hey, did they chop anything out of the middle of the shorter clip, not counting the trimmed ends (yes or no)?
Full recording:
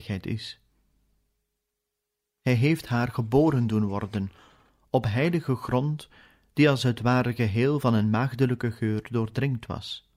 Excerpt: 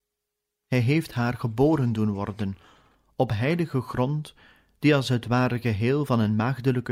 no